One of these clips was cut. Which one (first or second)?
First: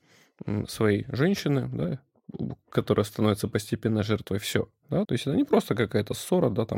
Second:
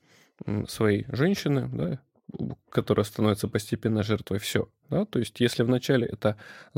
first